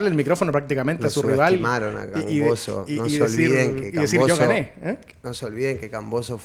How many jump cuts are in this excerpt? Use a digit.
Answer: 0